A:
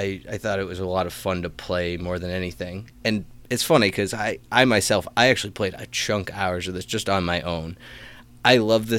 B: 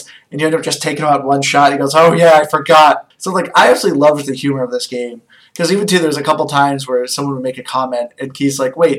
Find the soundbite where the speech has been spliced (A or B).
B